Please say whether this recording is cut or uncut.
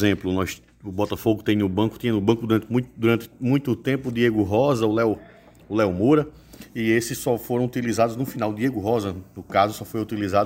uncut